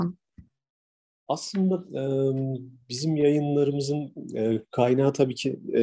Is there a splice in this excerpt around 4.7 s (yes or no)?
no